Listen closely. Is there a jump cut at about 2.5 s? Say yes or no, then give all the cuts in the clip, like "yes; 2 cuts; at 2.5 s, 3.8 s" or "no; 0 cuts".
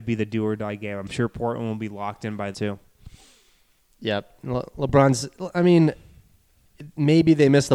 yes; 1 cut; at 2.5 s